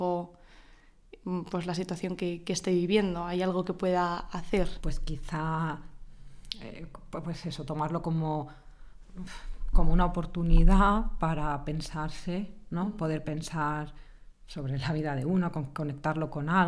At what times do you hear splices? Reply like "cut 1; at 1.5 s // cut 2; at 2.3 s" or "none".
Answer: none